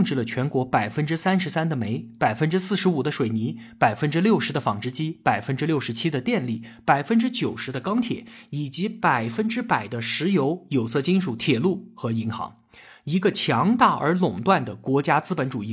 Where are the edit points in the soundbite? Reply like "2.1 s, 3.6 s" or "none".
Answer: none